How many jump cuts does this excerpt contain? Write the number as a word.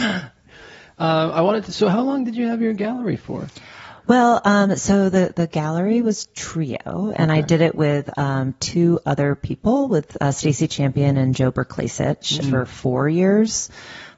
one